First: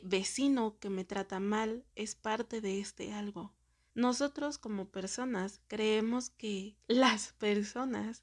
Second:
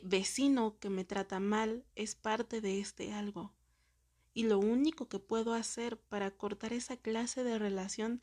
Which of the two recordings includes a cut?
first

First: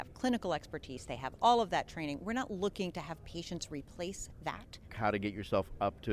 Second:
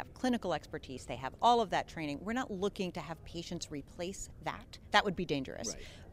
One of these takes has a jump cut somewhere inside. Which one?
first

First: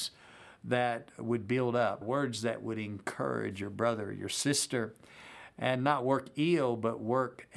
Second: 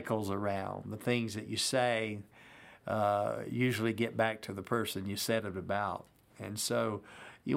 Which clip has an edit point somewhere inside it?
first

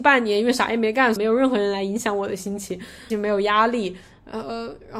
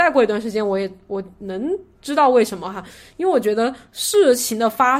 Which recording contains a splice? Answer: first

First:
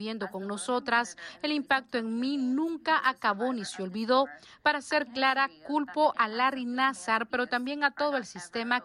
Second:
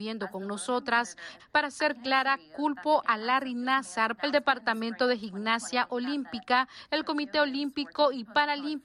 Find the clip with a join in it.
second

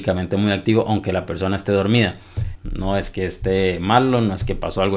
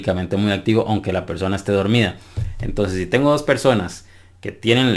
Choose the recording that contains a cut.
first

